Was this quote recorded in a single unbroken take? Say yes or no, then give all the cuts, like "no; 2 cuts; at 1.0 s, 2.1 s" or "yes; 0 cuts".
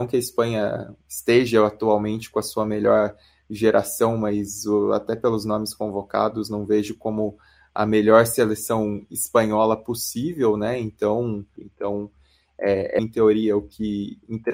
no; 2 cuts; at 11.6 s, 13.0 s